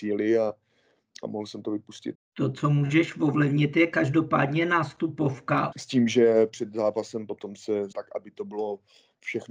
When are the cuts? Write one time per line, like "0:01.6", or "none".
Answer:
0:02.1
0:05.7
0:07.9